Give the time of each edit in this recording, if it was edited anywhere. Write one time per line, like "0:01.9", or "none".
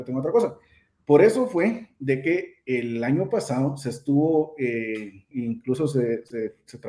0:05.3

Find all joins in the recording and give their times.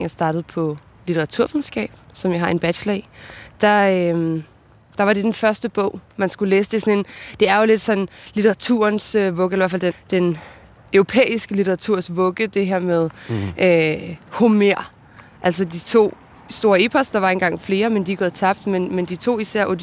0:09.9

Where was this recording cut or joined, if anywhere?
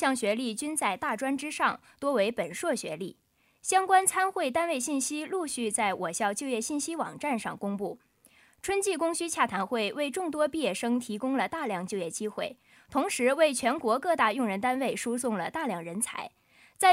none

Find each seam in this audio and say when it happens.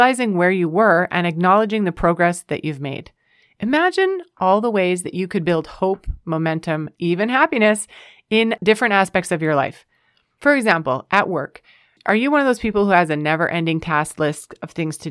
0:07.0

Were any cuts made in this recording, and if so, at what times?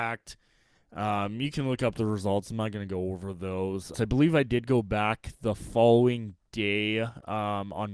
0:03.9

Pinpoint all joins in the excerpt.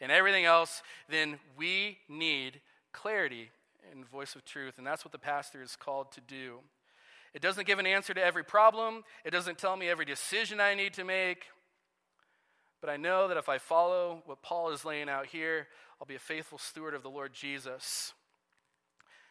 none

